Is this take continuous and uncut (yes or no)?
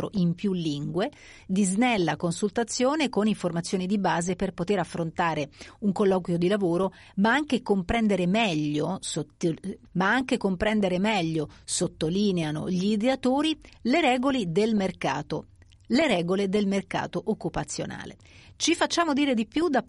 no